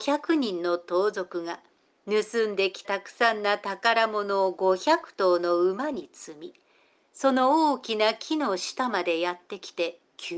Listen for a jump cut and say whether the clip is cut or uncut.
cut